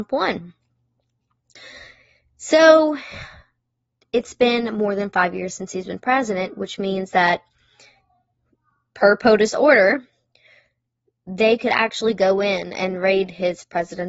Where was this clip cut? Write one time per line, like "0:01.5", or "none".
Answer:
none